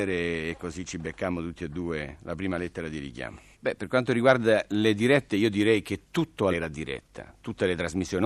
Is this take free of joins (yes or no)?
no